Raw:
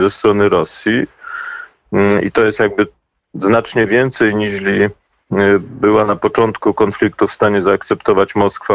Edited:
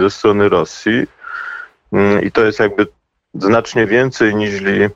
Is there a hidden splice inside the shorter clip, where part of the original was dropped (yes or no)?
no